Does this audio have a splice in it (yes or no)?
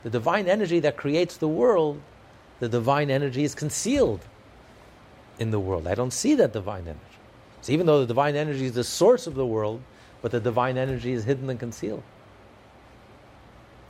no